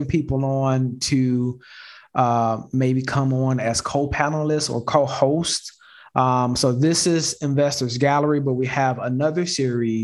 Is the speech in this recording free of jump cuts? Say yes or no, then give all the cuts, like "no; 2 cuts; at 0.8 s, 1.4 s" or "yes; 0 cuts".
yes; 0 cuts